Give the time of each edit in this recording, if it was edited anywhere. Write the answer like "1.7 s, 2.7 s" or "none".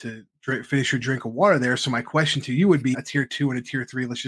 2.9 s